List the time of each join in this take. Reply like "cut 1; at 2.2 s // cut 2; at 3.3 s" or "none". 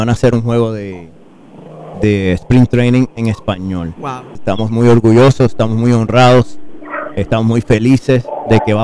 cut 1; at 4.4 s